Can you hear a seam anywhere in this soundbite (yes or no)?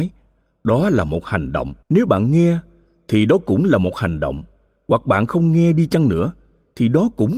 yes